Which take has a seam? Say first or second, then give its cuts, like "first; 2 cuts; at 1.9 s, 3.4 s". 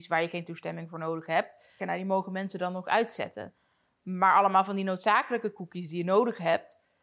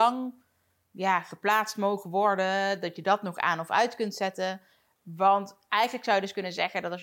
first; 1 cut; at 1.8 s